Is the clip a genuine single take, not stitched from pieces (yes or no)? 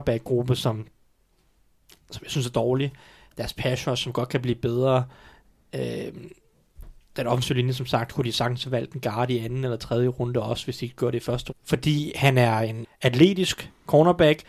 no